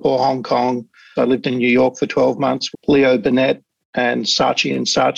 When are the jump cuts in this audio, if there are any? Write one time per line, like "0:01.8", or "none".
0:01.2
0:02.7